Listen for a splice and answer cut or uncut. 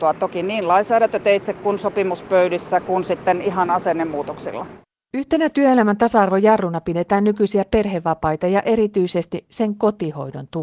uncut